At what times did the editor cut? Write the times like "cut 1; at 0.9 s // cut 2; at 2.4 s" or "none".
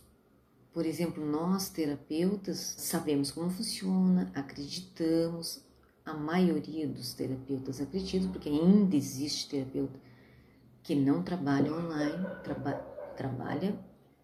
cut 1; at 2.8 s